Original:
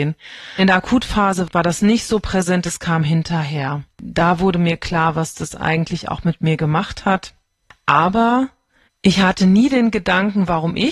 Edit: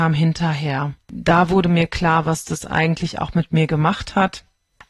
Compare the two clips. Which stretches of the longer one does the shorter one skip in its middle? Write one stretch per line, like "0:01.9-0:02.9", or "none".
none